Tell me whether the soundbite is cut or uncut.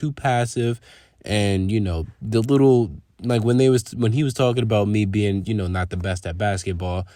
uncut